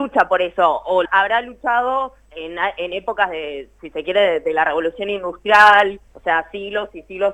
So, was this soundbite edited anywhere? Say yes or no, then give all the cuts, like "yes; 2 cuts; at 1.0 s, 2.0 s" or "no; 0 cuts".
yes; 3 cuts; at 1.0 s, 2.2 s, 6.1 s